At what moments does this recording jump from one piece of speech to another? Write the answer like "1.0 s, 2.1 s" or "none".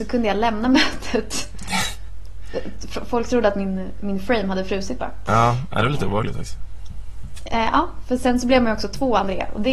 none